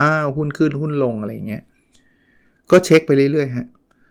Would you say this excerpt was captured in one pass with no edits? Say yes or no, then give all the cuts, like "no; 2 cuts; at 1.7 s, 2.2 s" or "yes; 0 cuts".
yes; 0 cuts